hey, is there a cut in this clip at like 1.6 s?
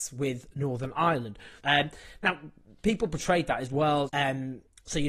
yes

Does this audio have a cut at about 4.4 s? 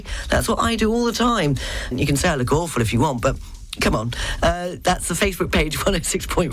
no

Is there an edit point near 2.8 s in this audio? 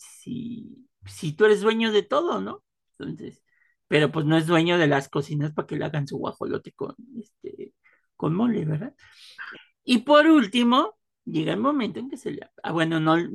no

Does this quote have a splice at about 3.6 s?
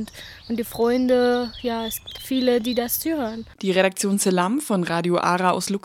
yes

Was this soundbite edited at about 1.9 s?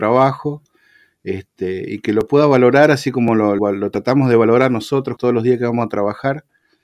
no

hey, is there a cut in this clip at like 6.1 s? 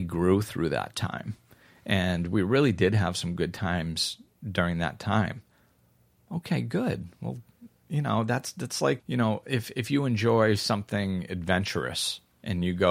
no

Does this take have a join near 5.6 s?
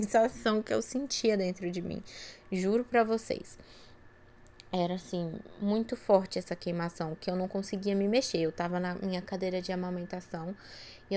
no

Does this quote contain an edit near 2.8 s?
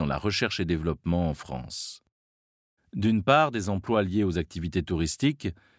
yes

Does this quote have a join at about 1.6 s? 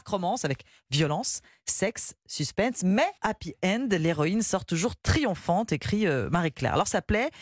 no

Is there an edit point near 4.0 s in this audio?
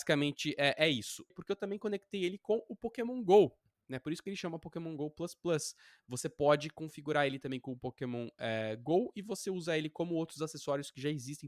no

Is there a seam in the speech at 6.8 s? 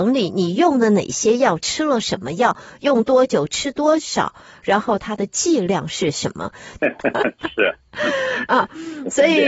yes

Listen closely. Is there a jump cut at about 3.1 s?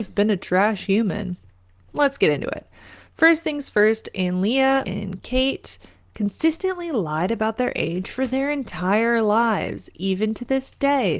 no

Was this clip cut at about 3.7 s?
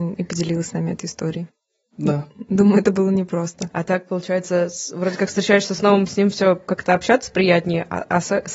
yes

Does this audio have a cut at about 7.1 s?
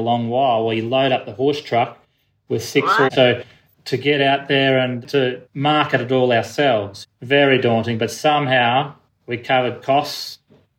no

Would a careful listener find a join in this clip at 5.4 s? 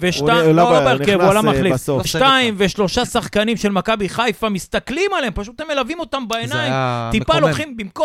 no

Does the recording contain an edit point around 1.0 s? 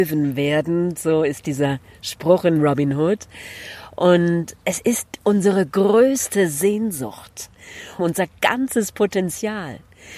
no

